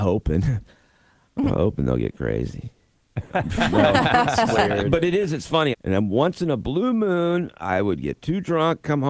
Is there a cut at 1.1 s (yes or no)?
no